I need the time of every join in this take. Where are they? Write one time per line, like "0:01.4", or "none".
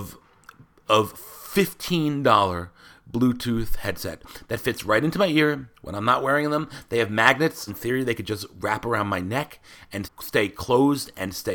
0:07.7
0:10.0